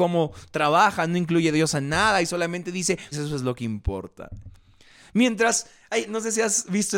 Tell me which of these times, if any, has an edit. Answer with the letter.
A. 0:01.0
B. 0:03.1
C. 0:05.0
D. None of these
B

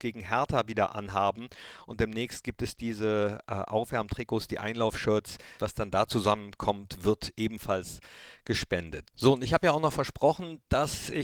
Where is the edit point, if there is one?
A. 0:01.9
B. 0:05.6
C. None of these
B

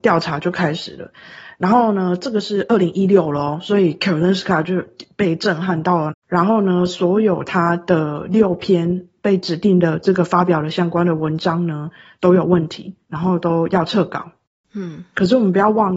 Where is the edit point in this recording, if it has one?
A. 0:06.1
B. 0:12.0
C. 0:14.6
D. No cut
A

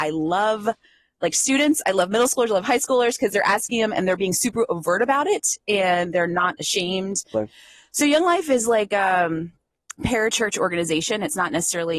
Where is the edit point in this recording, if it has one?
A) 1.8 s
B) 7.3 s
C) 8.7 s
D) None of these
B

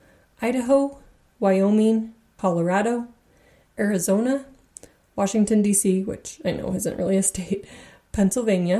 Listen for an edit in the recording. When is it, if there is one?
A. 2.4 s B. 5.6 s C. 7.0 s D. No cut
A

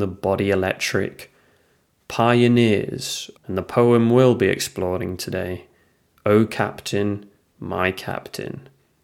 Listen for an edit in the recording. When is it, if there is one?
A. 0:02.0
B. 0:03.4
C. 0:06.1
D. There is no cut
B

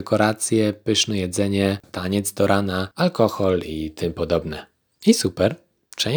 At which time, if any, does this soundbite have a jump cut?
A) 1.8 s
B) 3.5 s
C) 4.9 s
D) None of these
A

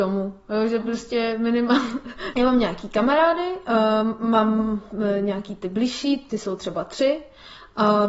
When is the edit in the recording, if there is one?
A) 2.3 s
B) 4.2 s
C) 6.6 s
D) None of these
A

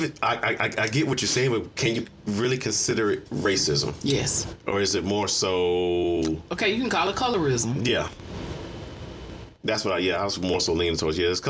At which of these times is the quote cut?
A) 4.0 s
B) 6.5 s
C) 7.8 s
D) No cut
D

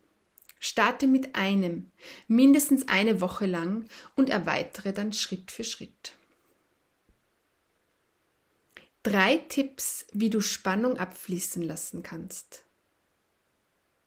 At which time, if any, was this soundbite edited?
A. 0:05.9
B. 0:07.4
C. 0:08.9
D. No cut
C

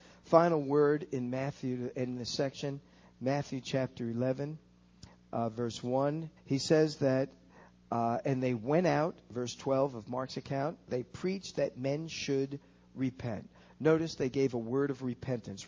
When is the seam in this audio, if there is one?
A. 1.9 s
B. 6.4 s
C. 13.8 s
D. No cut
B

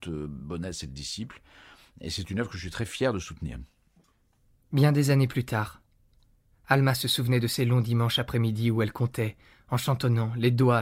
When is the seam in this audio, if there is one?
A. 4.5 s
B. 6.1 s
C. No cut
A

